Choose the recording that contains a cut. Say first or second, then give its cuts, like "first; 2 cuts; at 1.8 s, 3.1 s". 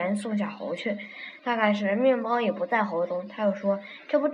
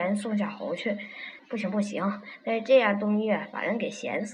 second; 1 cut; at 1.4 s